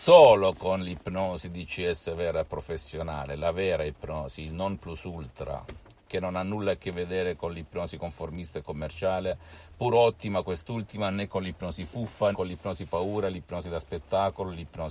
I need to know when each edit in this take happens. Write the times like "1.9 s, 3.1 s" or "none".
12.3 s